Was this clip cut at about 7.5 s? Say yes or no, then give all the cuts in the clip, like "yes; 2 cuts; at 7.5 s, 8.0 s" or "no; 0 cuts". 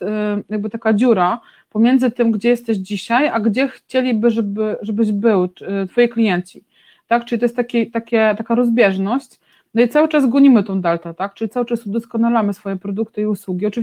no; 0 cuts